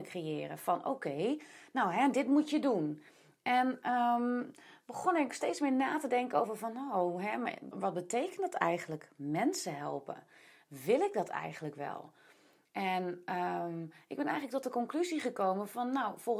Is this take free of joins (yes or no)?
no